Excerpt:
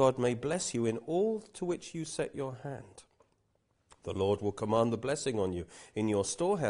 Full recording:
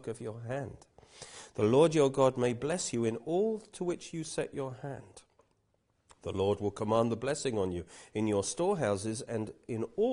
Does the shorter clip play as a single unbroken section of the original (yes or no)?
yes